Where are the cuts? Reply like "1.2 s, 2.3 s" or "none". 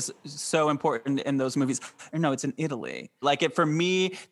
2.1 s, 3.2 s